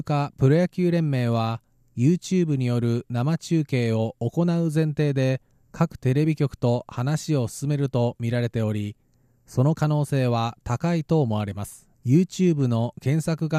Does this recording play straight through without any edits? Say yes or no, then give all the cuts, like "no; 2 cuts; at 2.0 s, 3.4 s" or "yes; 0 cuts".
no; 1 cut; at 11.9 s